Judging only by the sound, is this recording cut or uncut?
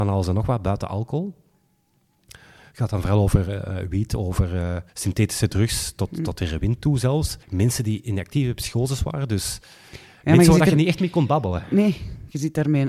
cut